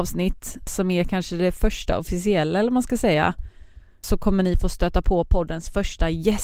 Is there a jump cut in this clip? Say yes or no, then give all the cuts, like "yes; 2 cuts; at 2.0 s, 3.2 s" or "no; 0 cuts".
no; 0 cuts